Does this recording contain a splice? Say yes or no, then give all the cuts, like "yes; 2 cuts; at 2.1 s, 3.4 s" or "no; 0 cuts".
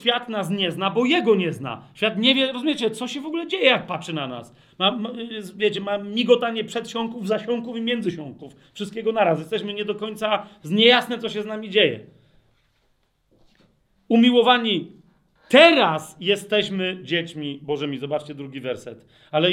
no; 0 cuts